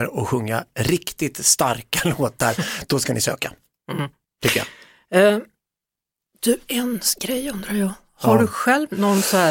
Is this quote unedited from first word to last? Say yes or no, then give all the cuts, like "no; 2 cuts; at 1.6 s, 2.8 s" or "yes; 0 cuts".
yes; 0 cuts